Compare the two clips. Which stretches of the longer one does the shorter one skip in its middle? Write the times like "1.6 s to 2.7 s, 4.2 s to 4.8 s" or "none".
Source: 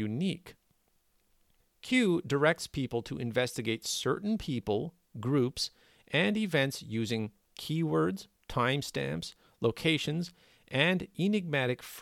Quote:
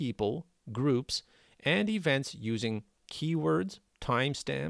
none